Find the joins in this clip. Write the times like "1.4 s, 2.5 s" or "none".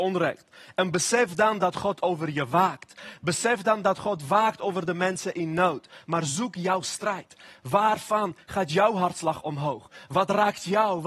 none